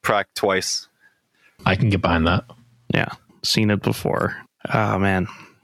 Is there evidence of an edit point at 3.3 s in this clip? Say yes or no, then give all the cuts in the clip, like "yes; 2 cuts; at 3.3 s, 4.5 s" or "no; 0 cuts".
yes; 2 cuts; at 1.6 s, 3.3 s